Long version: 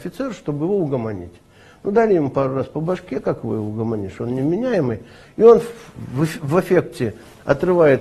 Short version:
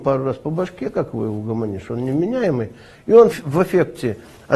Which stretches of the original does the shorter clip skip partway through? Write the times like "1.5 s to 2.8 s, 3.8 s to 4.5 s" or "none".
5.6 s to 6.3 s